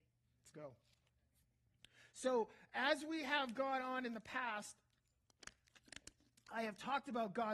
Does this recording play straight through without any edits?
yes; 0 cuts

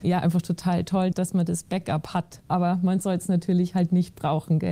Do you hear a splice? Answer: yes; 1 cut; at 1.1 s

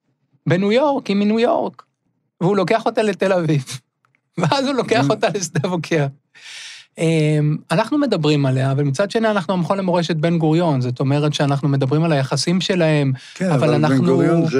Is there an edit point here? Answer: no; 0 cuts

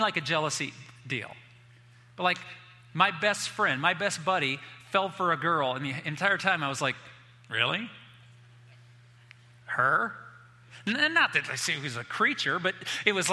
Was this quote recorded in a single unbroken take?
yes; 0 cuts

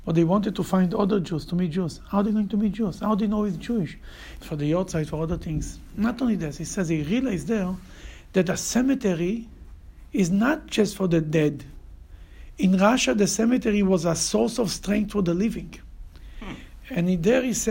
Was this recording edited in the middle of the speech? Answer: yes; 1 cut; at 4.4 s

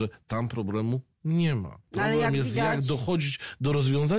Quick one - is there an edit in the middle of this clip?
yes; 1 cut; at 1.8 s

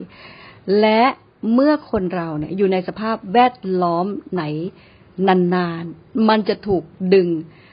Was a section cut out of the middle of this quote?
no; 0 cuts

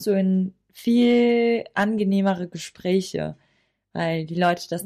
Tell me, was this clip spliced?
no; 0 cuts

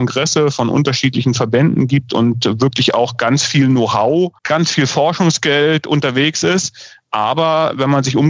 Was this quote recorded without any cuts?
no; 1 cut; at 4.4 s

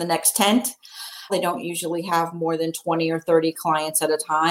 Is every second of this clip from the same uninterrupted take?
no; 1 cut; at 1.3 s

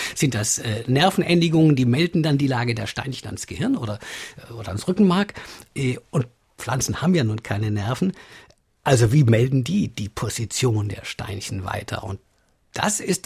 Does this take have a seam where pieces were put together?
no; 0 cuts

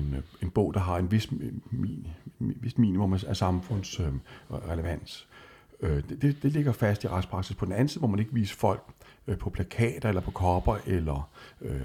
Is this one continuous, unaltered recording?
yes; 0 cuts

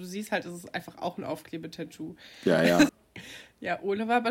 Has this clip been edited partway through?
yes; 1 cut; at 2.9 s

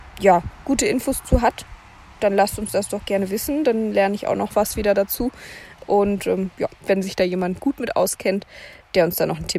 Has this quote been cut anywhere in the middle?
yes; 1 cut; at 6.8 s

